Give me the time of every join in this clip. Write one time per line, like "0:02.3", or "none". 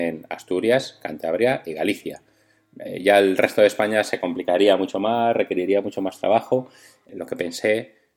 0:07.0